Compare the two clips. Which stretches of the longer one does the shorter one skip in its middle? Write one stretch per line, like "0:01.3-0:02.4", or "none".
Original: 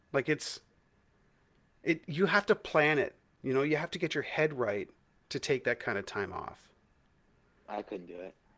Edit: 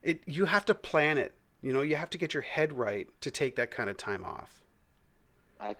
0:05.0-0:05.2